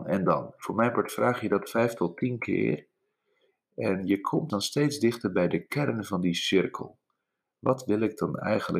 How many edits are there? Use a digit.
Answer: 1